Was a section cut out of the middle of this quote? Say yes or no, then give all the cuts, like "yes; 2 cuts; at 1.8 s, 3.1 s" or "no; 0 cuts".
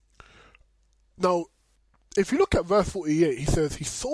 no; 0 cuts